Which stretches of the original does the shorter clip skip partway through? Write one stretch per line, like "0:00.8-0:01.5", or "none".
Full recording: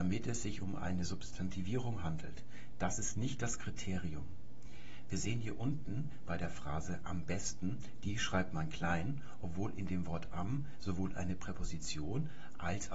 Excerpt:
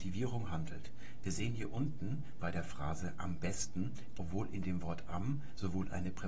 0:02.7-0:05.1
0:08.0-0:09.4